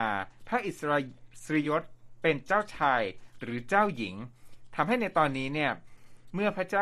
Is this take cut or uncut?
cut